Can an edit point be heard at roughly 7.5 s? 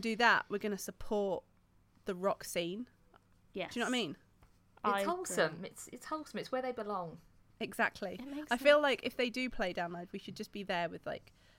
yes; 1 cut; at 7.5 s

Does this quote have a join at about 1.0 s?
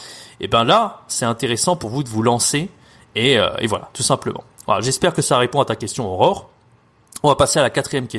no; 0 cuts

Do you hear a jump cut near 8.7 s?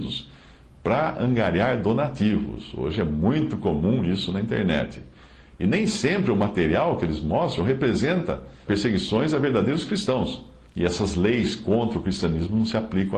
yes; 2 cuts; at 8.7 s, 10.7 s

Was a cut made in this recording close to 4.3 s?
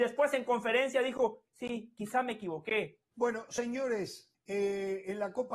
yes; 2 cuts; at 3.1 s, 4.3 s

